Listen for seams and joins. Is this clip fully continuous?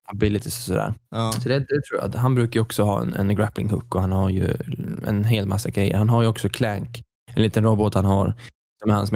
no; 1 cut; at 1.0 s

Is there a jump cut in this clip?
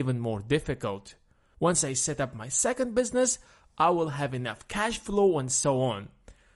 yes; 1 cut; at 1.5 s

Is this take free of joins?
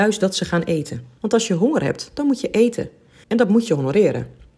no; 2 cuts; at 1.2 s, 3.2 s

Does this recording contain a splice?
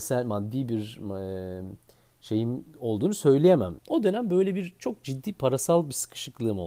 yes; 1 cut; at 3.8 s

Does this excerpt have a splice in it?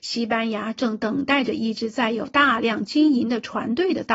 no; 0 cuts

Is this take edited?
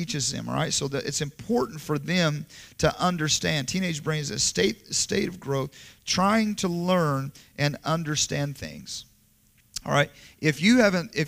no; 0 cuts

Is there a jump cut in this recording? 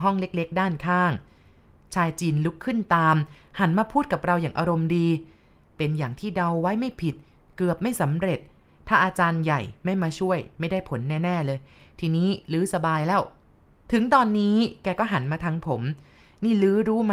no; 0 cuts

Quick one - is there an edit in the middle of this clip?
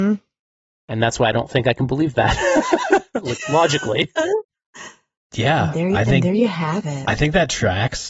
no; 0 cuts

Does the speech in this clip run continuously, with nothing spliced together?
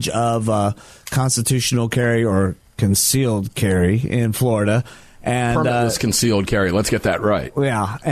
yes; 0 cuts

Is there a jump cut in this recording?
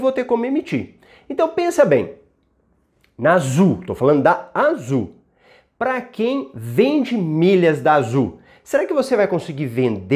no; 0 cuts

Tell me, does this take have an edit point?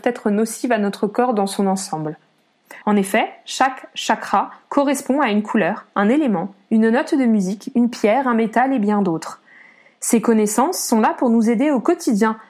yes; 1 cut; at 2.8 s

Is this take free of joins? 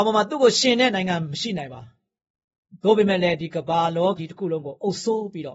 no; 1 cut; at 4.2 s

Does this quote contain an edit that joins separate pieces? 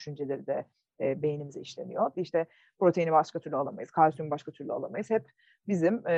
yes; 1 cut; at 2.1 s

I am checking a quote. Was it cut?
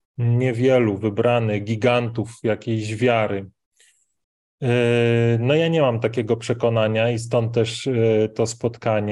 no; 0 cuts

